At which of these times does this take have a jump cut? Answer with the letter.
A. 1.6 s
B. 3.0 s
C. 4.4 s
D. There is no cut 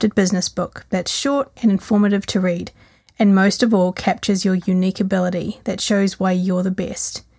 A